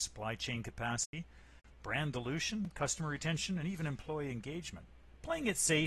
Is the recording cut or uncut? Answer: uncut